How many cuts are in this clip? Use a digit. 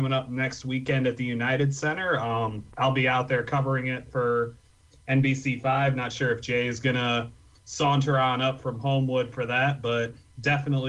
0